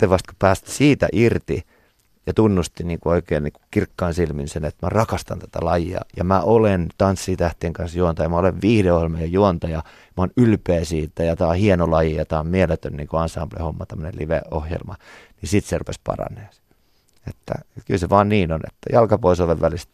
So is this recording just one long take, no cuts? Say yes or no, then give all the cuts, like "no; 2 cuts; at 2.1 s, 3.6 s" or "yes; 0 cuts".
yes; 0 cuts